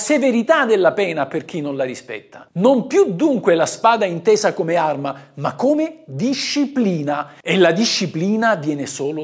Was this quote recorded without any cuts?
yes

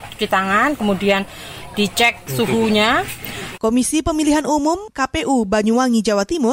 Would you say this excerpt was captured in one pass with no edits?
no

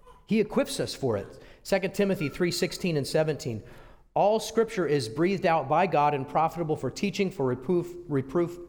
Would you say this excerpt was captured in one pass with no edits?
yes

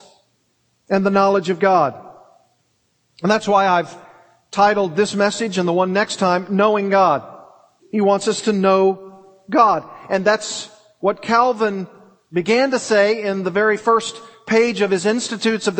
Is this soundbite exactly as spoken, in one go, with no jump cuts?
no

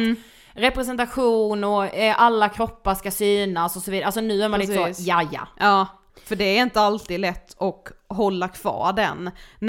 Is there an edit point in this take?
yes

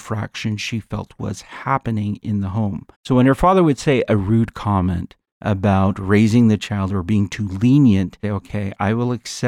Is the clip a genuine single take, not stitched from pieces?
no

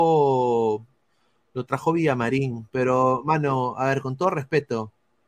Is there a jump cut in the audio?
no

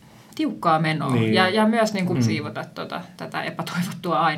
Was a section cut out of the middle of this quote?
yes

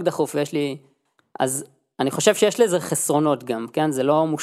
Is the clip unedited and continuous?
yes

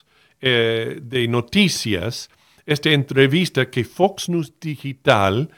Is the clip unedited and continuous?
yes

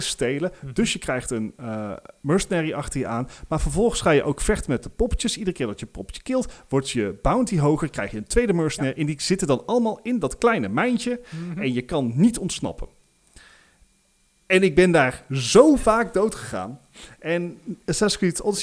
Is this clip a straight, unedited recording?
yes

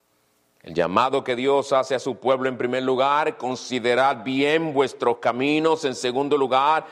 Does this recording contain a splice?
no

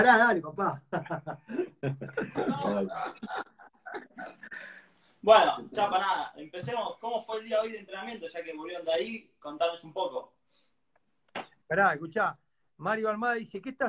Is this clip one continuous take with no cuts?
no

